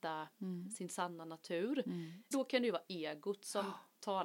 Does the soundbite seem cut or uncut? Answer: cut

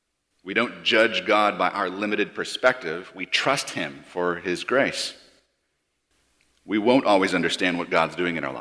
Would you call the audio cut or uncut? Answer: uncut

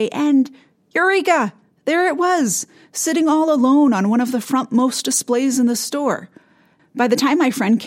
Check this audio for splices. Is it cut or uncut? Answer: cut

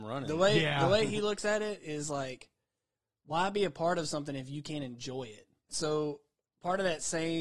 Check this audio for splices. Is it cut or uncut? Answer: cut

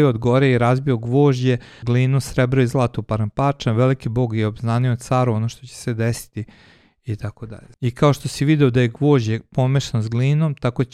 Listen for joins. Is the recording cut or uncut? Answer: cut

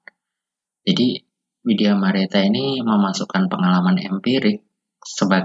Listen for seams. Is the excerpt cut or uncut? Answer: uncut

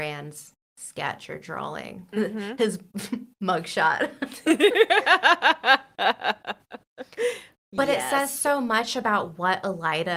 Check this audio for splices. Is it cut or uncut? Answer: uncut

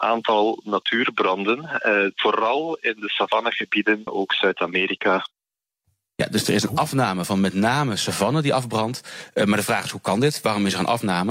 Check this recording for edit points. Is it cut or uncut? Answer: cut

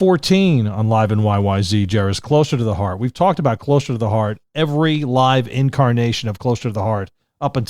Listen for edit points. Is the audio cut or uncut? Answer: uncut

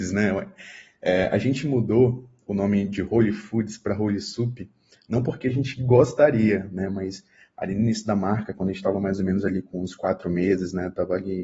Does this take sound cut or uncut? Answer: uncut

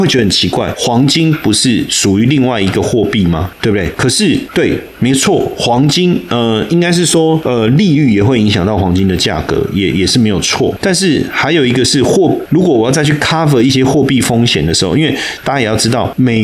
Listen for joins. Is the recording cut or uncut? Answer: cut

